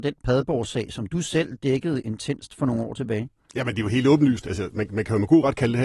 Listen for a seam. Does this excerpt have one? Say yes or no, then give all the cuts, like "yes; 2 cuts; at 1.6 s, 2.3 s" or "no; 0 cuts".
no; 0 cuts